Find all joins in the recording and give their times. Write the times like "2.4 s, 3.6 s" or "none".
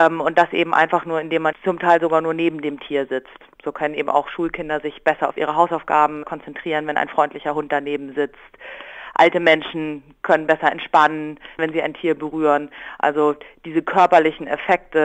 1.5 s, 6.2 s, 11.6 s